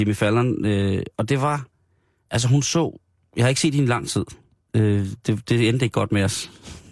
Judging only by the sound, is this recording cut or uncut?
uncut